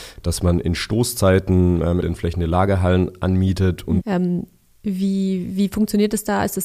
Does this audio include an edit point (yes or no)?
yes